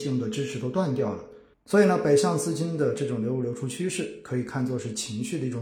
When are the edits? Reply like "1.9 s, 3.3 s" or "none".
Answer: 1.5 s